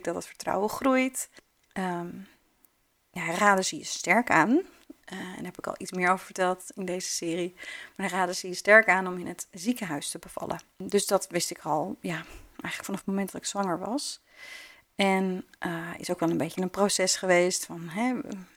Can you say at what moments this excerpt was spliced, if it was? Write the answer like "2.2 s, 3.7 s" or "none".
1.5 s